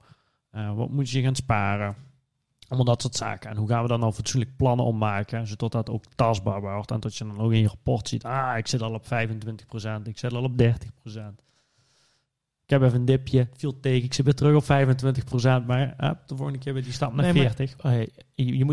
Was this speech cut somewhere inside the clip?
yes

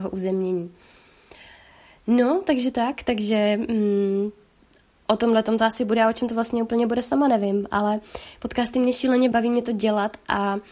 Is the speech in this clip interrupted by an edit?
yes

